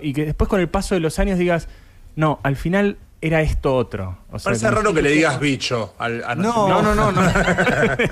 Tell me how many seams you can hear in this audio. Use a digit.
0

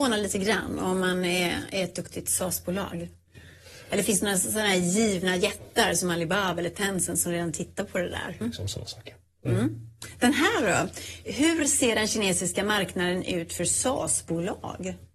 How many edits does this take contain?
1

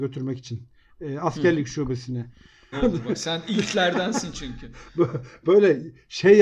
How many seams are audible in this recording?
1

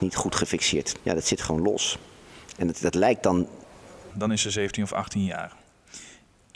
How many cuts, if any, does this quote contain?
2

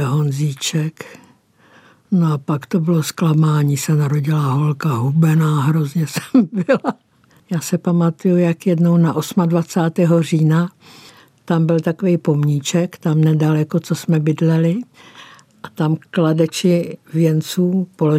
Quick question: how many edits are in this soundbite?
1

